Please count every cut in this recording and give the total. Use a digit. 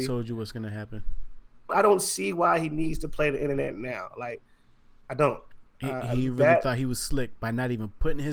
2